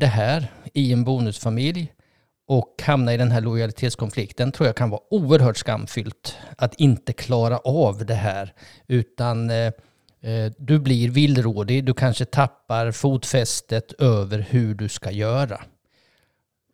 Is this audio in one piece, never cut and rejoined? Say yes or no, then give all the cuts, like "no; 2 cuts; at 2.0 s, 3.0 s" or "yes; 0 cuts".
yes; 0 cuts